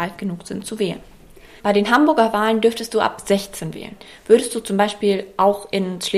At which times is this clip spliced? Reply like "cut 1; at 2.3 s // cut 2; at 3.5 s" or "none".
cut 1; at 1.6 s